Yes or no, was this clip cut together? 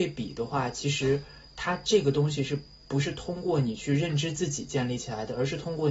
no